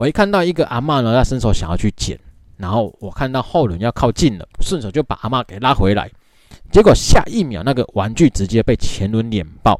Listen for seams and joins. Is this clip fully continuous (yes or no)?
no